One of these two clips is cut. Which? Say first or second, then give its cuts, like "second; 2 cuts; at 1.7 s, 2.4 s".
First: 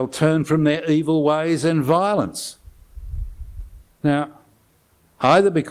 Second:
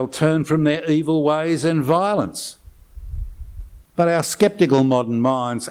second; 1 cut; at 3.8 s